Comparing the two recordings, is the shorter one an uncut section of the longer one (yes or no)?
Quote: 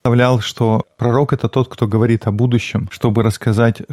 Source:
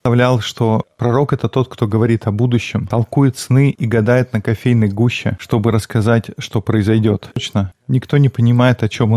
no